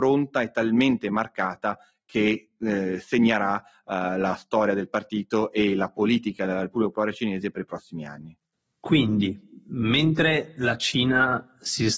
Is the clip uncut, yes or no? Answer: yes